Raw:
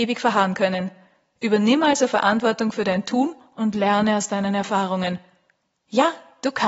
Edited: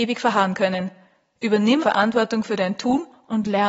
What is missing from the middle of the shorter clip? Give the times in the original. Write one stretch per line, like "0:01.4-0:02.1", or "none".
0:01.8-0:02.1

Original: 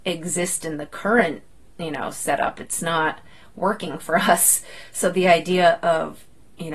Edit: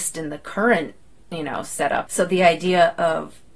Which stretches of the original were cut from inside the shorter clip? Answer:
0:02.5-0:04.9

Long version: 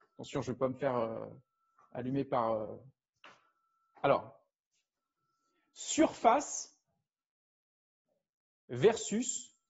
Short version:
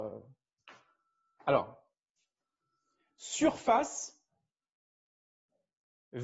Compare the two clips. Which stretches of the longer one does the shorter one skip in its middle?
none

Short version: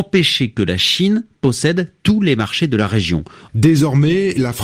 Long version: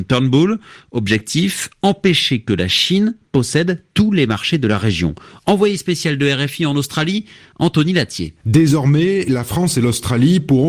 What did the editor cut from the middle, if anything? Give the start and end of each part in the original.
0:05.4-0:08.4

